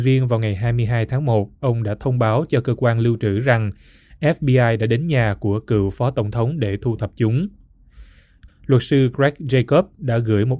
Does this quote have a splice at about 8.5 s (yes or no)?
yes